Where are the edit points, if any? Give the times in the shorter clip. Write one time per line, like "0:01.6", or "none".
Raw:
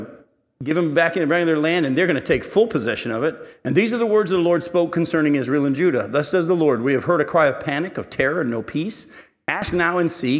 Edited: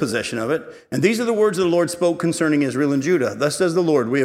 none